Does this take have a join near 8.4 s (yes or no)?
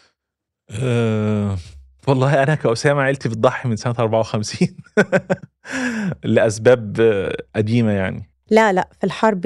no